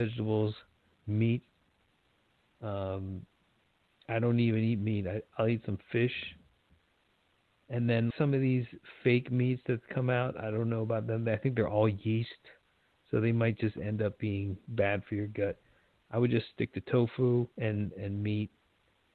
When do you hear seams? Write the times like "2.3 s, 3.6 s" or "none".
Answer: 8.1 s, 17.5 s